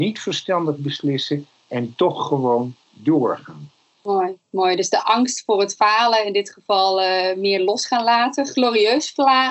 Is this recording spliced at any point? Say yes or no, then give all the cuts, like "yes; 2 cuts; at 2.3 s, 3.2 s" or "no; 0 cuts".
no; 0 cuts